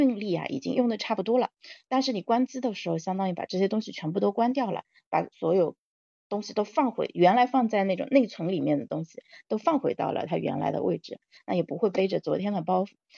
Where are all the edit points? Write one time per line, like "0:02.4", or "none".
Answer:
0:11.4